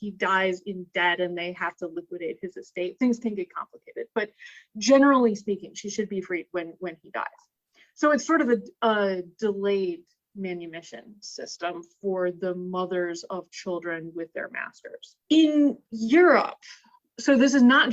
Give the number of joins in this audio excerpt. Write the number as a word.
one